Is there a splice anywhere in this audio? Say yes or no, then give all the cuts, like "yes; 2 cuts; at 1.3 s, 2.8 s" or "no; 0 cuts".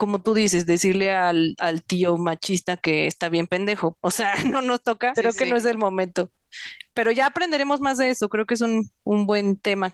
yes; 2 cuts; at 3.9 s, 5.1 s